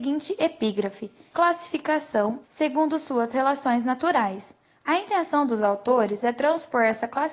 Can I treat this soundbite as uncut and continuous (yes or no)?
no